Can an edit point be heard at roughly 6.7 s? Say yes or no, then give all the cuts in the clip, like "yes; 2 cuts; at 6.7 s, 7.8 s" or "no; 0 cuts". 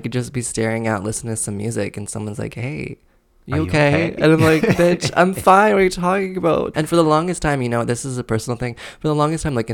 yes; 1 cut; at 6.7 s